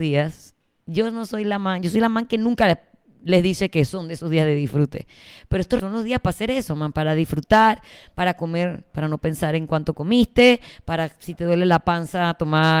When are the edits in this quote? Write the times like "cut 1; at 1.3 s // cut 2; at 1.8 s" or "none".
cut 1; at 5.8 s